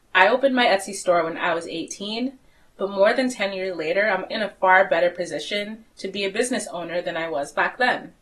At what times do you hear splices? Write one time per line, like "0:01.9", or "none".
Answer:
0:04.3

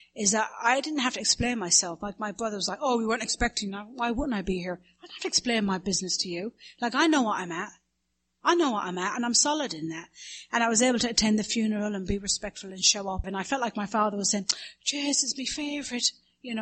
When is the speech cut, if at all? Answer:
0:13.2

